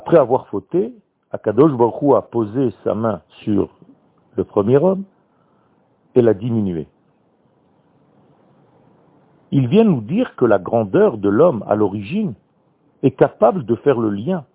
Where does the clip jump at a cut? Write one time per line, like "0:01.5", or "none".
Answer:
0:03.3
0:09.4